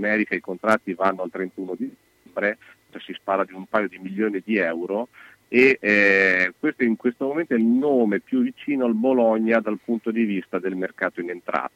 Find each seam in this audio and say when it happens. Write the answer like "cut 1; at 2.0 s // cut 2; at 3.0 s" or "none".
cut 1; at 2.9 s